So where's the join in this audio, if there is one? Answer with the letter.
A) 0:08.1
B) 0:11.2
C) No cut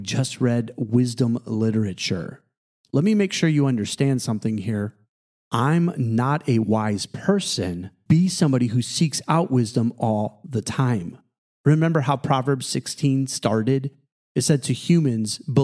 A